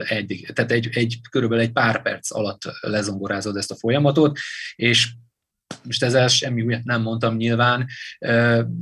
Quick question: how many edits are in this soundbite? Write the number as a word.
one